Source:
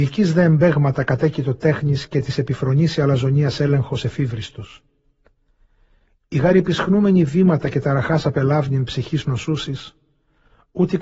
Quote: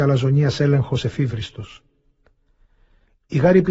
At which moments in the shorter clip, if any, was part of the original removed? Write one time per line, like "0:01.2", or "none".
none